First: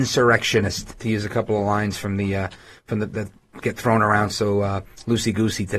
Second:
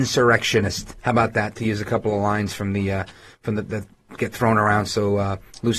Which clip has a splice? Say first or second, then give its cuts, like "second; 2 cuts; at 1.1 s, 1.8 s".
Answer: first; 1 cut; at 1.0 s